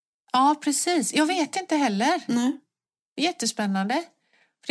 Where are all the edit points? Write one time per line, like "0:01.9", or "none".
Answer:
none